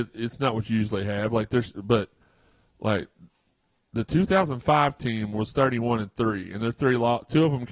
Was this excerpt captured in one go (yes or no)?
yes